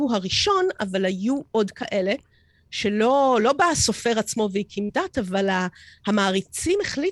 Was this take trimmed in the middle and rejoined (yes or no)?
no